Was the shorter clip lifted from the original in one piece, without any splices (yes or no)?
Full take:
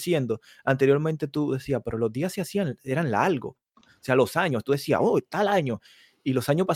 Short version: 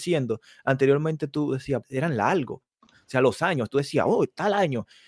no